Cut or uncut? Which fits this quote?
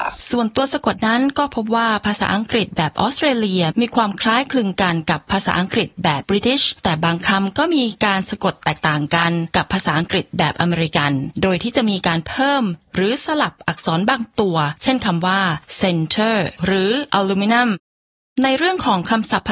cut